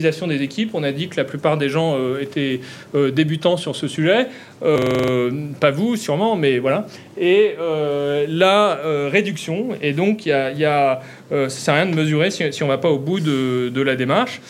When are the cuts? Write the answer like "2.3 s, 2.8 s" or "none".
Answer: none